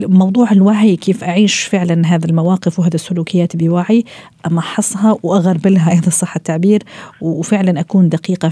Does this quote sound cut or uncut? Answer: uncut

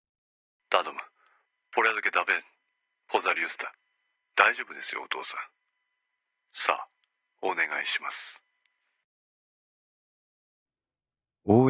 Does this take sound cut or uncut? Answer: uncut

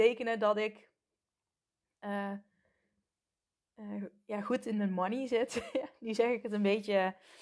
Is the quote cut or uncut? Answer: uncut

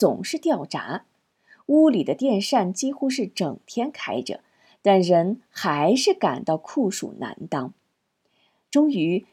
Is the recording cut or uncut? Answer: uncut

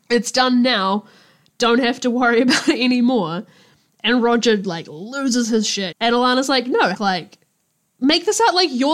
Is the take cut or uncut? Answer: cut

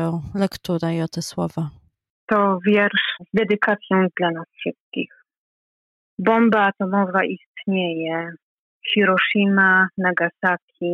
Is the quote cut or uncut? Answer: uncut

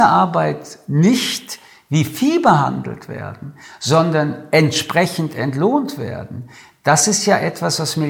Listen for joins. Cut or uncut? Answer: uncut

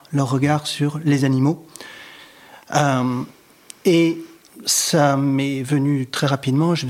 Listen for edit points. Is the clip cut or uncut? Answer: uncut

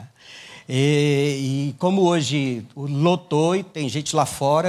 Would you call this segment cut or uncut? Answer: uncut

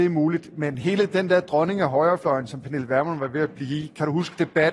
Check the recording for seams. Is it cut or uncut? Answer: uncut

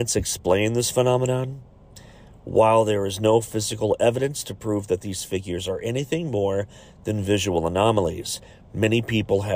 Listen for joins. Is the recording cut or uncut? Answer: uncut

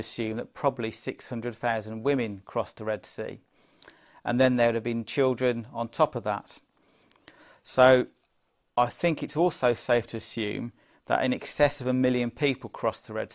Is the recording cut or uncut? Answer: uncut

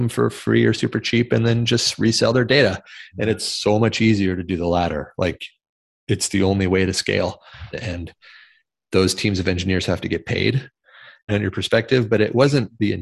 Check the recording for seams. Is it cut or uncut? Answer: cut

